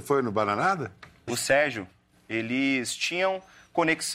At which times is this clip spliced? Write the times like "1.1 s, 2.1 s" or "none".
1.3 s